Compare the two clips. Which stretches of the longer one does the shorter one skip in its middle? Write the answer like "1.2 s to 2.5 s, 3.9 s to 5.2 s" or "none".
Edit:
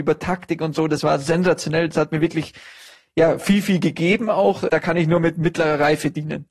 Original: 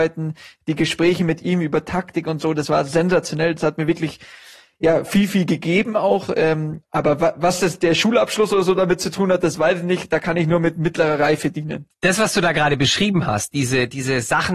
6.3 s to 10.1 s